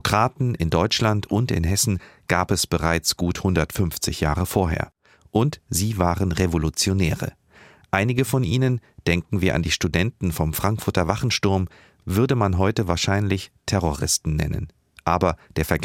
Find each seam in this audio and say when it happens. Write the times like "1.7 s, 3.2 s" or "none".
none

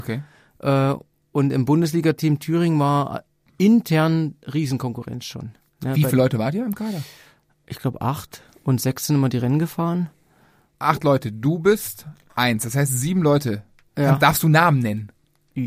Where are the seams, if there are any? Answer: none

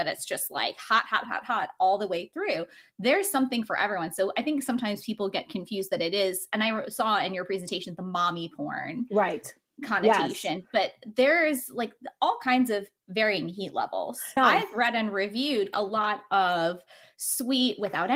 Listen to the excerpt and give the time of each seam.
1.2 s, 14.4 s, 15.7 s

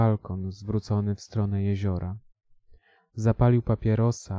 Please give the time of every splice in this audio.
3.0 s

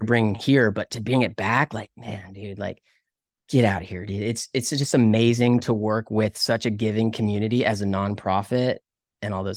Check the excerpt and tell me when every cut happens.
none

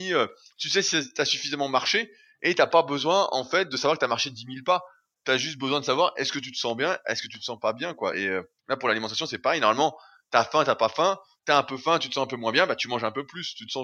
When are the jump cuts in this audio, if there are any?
none

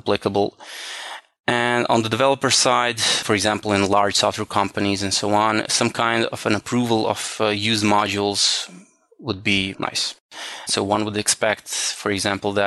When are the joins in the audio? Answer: 10.7 s

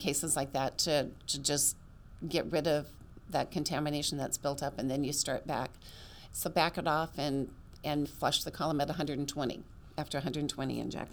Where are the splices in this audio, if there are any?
6.3 s, 8.0 s

